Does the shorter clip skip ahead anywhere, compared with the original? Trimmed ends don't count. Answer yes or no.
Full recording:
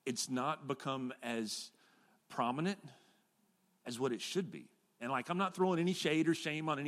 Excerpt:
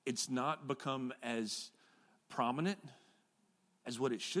no